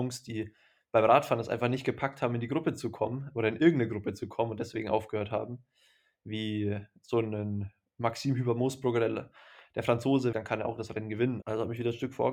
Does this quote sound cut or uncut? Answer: cut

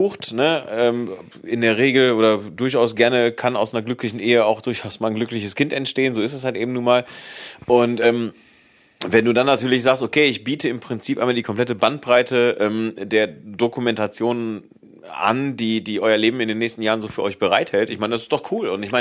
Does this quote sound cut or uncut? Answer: uncut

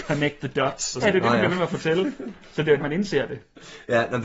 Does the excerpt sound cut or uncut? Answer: cut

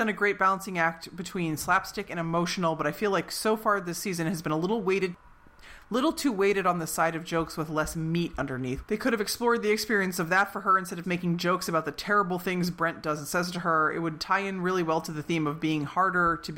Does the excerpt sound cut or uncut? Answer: cut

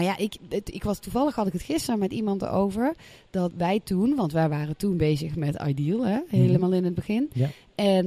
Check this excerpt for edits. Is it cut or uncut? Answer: cut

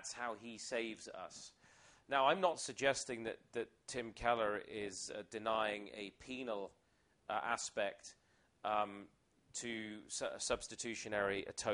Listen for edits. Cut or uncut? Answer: uncut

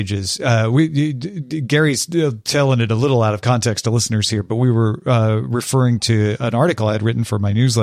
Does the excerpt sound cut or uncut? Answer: uncut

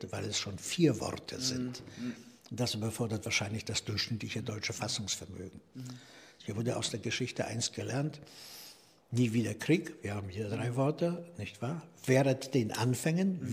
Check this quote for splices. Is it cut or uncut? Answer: cut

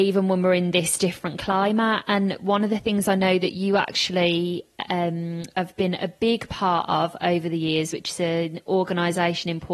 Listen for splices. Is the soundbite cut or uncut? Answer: uncut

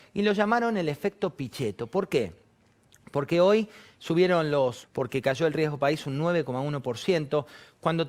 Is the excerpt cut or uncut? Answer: cut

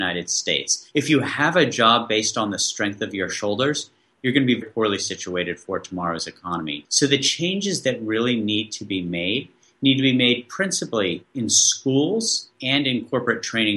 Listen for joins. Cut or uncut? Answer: cut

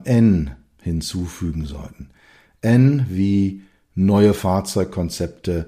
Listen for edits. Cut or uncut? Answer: uncut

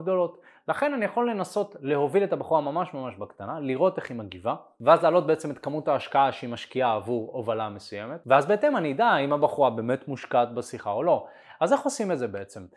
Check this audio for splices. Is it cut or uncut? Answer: uncut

